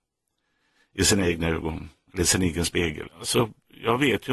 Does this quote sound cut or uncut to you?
cut